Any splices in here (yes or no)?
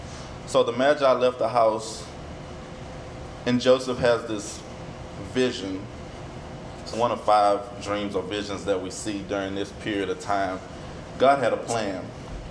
yes